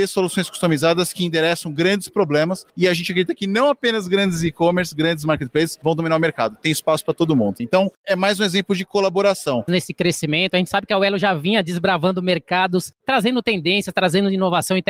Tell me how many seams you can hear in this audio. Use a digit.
2